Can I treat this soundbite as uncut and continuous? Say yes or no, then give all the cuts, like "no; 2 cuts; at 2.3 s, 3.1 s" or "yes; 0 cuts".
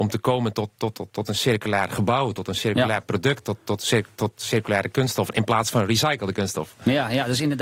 yes; 0 cuts